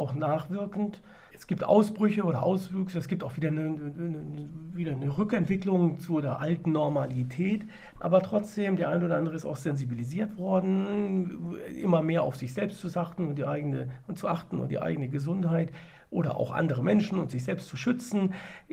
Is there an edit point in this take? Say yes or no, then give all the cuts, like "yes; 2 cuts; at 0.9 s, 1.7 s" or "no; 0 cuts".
no; 0 cuts